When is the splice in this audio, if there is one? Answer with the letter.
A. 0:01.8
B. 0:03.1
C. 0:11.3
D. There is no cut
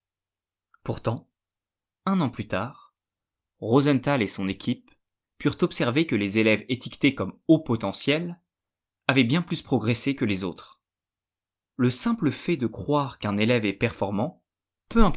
D